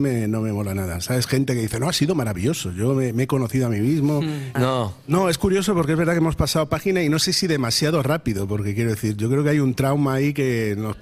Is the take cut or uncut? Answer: cut